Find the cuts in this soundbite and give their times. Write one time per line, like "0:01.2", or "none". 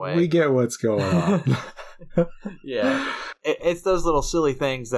0:03.6